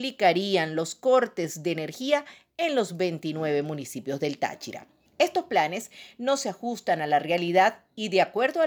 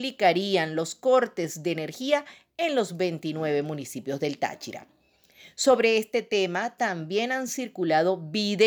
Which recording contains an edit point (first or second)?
first